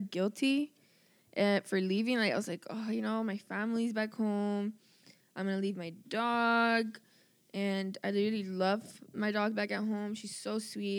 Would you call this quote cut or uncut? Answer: uncut